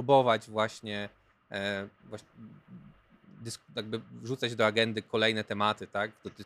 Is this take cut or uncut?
uncut